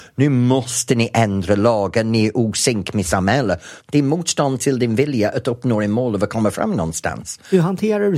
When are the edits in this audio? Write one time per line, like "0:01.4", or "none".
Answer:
0:03.8